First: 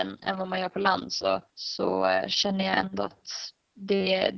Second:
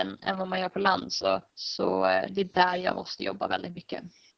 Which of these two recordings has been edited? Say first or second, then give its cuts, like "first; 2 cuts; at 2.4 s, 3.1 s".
second; 1 cut; at 2.3 s